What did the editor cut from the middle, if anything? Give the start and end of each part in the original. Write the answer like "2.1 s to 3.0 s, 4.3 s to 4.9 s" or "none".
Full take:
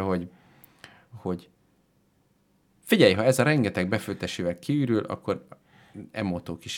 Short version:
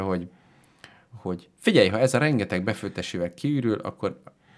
1.5 s to 2.8 s